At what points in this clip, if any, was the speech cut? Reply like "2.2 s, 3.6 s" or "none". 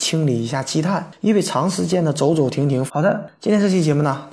2.9 s